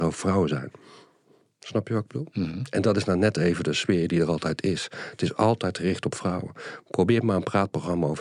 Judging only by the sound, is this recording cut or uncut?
uncut